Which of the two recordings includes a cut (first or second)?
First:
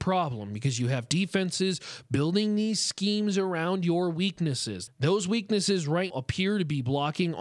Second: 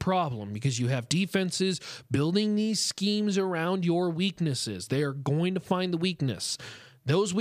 first